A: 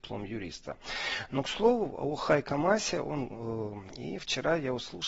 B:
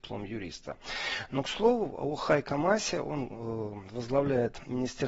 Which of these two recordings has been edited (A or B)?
A